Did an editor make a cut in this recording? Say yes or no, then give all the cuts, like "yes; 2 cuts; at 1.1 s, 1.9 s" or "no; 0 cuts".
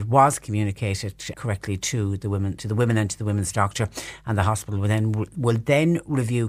yes; 2 cuts; at 1.3 s, 2.6 s